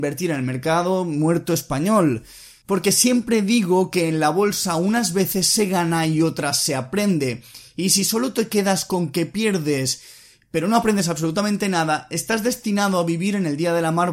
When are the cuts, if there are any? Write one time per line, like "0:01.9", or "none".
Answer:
0:02.6